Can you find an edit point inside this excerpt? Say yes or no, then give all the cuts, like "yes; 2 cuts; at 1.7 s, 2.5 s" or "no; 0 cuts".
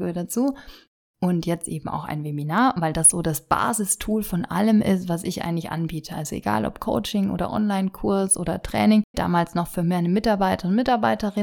yes; 1 cut; at 9.1 s